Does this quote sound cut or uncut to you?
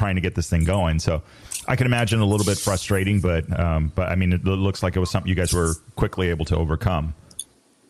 uncut